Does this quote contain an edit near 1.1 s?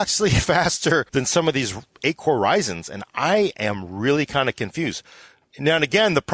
yes; 1 cut; at 1.1 s

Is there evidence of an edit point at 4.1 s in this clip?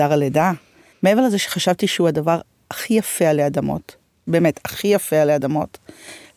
no; 1 cut; at 0.9 s

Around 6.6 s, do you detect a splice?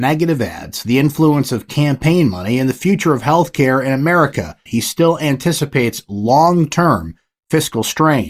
no; 1 cut; at 4.7 s

